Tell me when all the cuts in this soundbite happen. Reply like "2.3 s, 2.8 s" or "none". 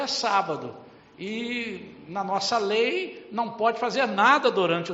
none